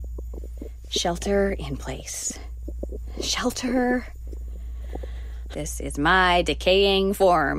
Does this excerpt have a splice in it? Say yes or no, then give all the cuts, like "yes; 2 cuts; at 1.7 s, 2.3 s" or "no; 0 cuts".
yes; 1 cut; at 5.5 s